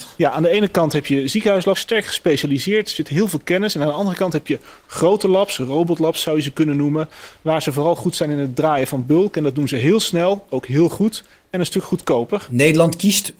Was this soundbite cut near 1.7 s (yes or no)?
yes